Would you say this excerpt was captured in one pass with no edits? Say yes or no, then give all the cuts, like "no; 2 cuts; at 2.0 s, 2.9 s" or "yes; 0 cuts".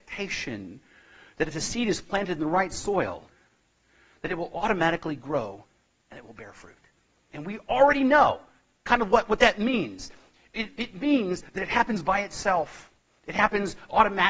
no; 1 cut; at 7.3 s